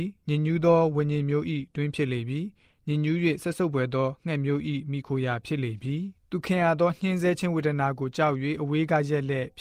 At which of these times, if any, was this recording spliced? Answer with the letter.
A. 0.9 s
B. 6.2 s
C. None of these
B